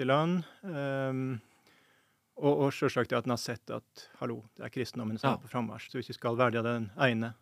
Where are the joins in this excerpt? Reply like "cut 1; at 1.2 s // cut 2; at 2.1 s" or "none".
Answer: cut 1; at 5.9 s